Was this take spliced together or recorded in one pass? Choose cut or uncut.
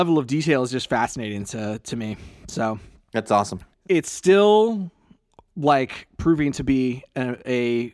cut